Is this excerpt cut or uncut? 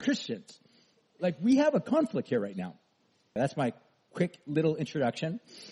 cut